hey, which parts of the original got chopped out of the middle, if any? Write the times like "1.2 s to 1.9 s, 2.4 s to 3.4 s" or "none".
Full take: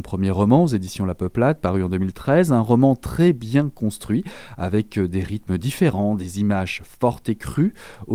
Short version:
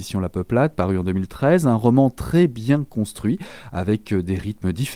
none